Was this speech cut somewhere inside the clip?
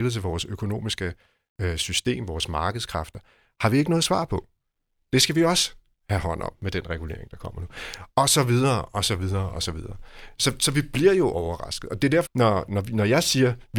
yes; 1 cut; at 12.3 s

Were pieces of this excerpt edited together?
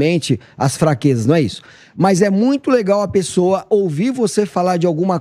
no; 0 cuts

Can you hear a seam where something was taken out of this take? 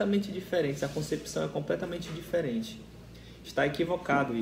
yes; 1 cut; at 3.4 s

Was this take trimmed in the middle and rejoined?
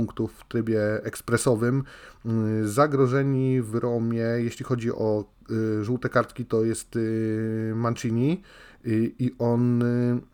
no; 0 cuts

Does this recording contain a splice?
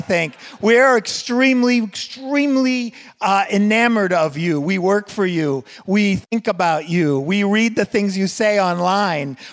no; 0 cuts

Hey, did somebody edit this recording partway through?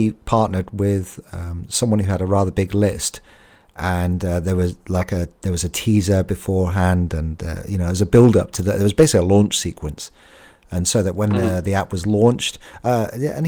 no; 0 cuts

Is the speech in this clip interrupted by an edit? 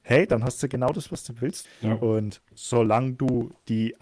yes; 1 cut; at 1.6 s

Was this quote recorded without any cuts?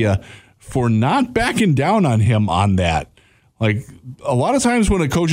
yes; 0 cuts

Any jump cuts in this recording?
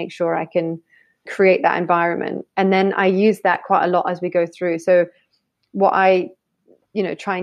yes; 1 cut; at 1.3 s

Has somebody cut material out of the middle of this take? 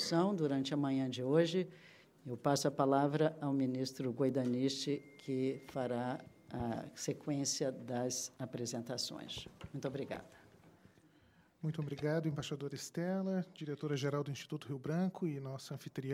yes; 1 cut; at 2.0 s

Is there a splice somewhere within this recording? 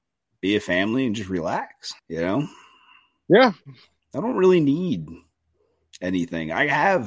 yes; 1 cut; at 2.0 s

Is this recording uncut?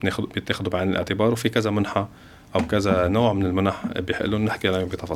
yes; 0 cuts

